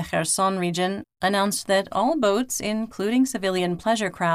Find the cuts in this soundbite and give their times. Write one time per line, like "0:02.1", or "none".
0:01.0